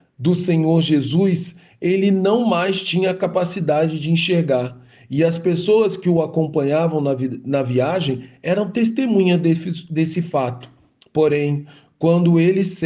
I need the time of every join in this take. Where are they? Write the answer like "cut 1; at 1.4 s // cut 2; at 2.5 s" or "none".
none